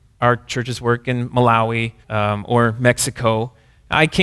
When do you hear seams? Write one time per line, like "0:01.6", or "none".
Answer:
0:02.0